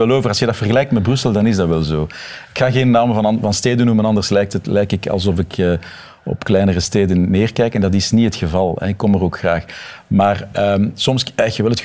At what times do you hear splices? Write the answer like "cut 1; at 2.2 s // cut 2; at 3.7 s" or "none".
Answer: none